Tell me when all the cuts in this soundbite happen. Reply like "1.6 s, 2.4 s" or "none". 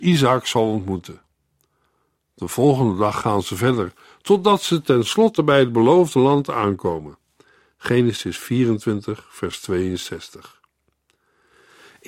none